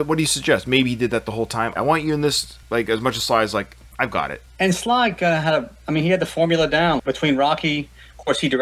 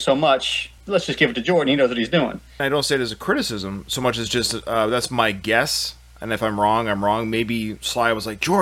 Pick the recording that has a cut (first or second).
first